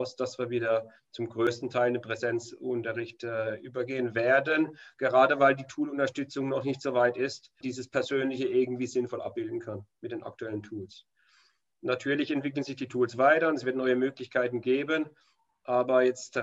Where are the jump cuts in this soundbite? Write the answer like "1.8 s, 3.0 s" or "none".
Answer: 4.9 s, 7.6 s